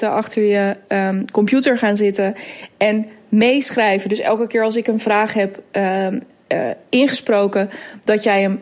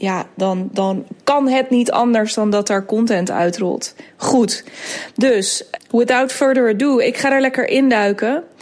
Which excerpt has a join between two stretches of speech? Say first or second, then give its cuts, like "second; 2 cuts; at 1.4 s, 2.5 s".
second; 1 cut; at 5.8 s